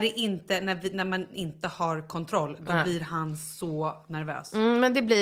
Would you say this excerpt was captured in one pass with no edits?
yes; 0 cuts

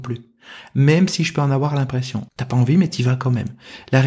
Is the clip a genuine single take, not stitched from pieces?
no; 1 cut; at 2.3 s

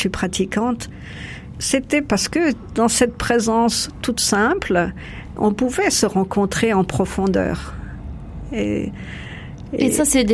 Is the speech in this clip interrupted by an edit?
yes; 2 cuts; at 1.6 s, 5.4 s

